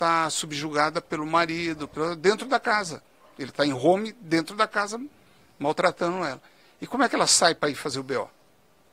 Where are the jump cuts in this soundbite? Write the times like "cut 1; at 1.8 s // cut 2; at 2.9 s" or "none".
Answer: none